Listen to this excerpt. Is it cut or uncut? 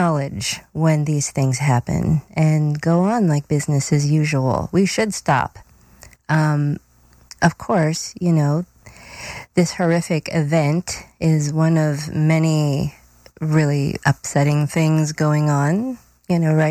uncut